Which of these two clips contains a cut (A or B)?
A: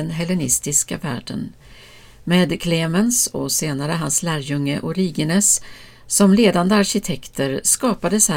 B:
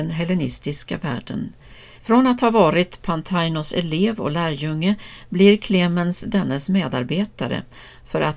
B